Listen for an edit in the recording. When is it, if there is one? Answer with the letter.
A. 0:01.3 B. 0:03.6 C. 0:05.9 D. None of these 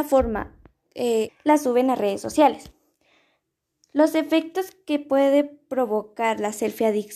A